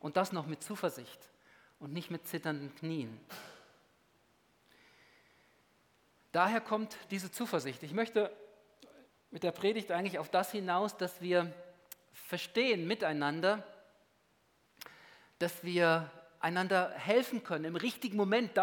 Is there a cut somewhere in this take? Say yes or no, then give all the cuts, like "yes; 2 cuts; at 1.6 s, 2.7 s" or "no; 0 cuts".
no; 0 cuts